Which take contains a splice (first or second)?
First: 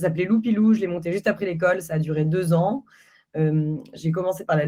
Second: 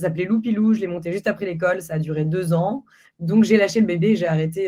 second